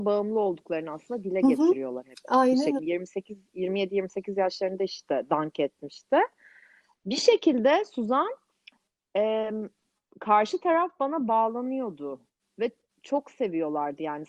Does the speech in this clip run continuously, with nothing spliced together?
no; 1 cut; at 2.8 s

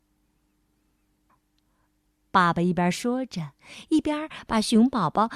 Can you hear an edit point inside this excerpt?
yes; 1 cut; at 1.3 s

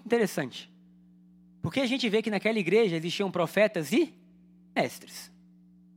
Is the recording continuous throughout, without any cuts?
yes; 0 cuts

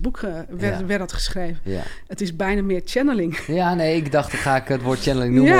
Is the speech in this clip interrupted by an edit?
no; 0 cuts

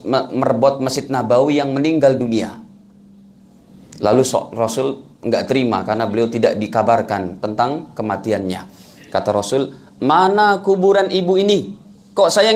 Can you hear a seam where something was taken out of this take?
no; 0 cuts

